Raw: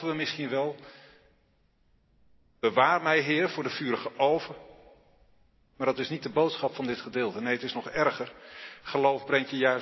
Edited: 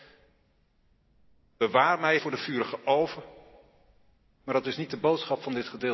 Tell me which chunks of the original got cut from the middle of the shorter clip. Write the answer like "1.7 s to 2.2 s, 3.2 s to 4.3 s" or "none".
3.2 s to 3.5 s